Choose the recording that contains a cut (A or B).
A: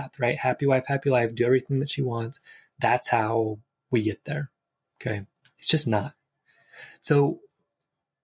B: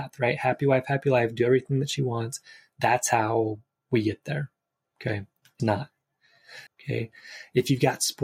B